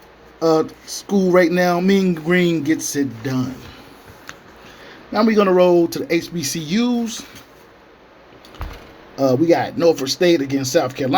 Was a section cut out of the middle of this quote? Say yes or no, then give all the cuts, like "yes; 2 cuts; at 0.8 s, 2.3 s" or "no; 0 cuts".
no; 0 cuts